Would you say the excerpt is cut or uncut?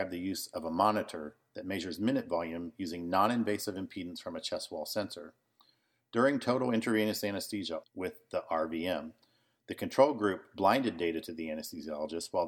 cut